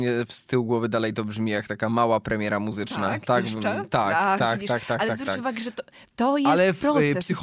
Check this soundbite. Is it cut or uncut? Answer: uncut